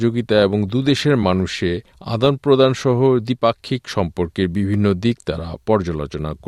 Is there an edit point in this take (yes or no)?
yes